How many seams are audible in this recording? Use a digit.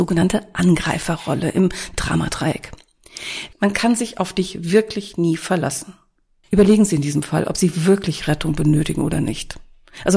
2